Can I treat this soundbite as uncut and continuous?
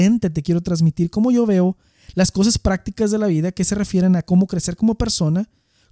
yes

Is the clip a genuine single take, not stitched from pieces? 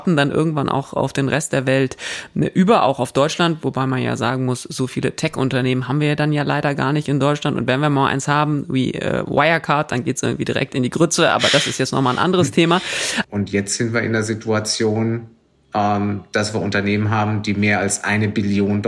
no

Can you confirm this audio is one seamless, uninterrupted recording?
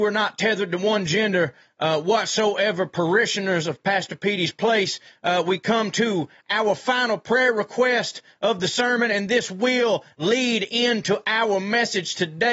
yes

